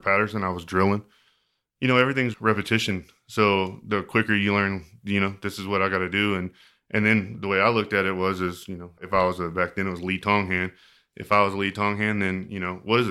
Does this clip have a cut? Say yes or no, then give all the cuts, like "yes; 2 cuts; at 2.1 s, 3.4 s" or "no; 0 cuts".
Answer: no; 0 cuts